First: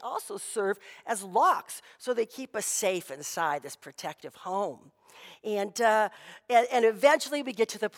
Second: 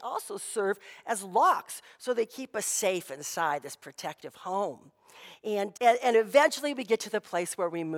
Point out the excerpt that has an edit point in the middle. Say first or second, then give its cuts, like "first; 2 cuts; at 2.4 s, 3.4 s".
second; 1 cut; at 5.7 s